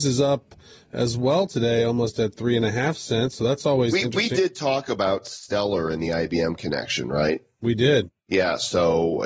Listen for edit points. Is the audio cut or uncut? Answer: cut